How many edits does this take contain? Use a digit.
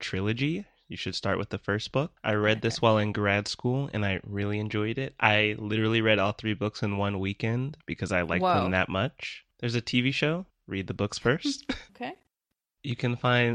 2